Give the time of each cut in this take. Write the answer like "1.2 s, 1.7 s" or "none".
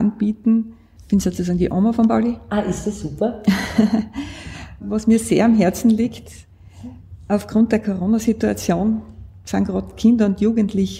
1.0 s